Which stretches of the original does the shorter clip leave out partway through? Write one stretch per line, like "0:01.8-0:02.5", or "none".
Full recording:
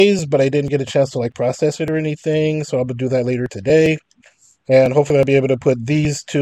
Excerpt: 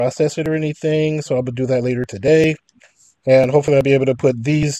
none